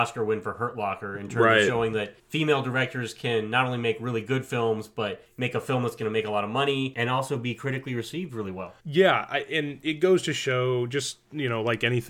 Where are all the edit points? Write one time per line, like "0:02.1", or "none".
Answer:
0:08.8